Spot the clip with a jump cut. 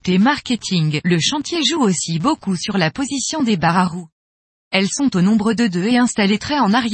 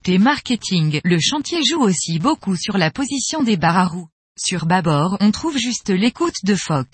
second; 1 cut; at 4.2 s

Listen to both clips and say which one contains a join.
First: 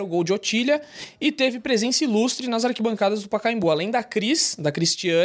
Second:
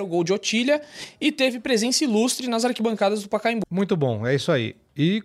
second; 1 cut; at 3.6 s

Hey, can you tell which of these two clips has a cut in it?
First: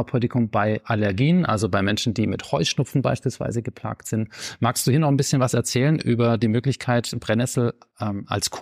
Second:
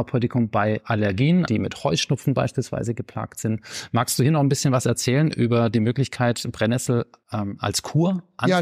second; 1 cut; at 1.5 s

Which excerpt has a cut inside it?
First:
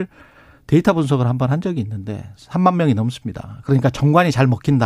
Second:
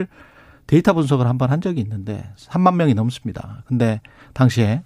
first; 1 cut; at 3.6 s

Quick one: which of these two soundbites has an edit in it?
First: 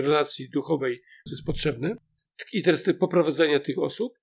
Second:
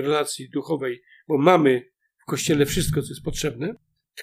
first; 1 cut; at 1.3 s

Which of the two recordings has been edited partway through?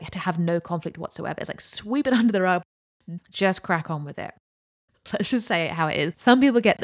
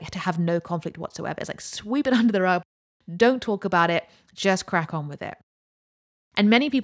first; 2 cuts; at 3.2 s, 4.9 s

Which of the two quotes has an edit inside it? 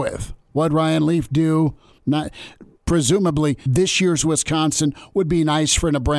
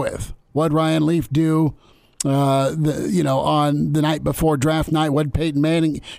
first; 2 cuts; at 2.0 s, 3.7 s

